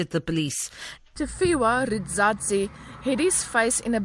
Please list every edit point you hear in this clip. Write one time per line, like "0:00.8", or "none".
0:01.0